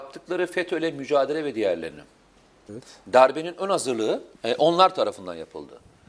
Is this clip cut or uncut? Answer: cut